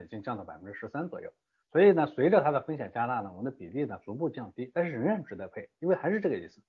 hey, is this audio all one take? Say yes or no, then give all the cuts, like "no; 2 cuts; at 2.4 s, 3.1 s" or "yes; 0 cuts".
yes; 0 cuts